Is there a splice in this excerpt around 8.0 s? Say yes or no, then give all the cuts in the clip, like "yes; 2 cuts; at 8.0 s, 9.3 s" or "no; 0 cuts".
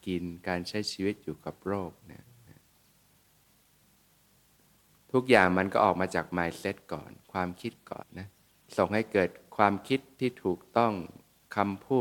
yes; 1 cut; at 8.0 s